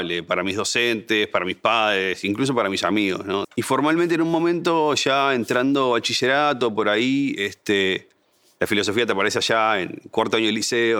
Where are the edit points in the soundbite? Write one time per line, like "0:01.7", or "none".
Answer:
0:03.4